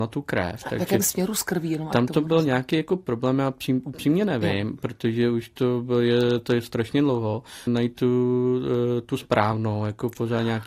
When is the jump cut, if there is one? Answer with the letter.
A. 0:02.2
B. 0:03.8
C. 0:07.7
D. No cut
C